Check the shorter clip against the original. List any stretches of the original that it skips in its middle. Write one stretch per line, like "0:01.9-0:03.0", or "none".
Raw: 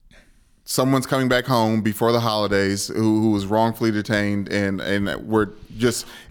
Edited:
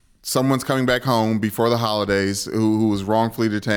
none